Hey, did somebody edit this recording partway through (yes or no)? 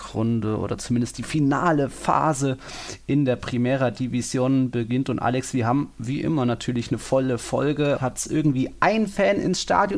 yes